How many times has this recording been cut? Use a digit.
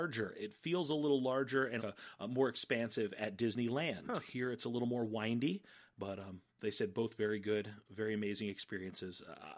1